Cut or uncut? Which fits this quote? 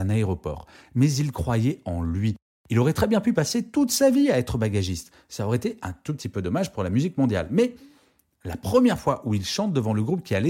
uncut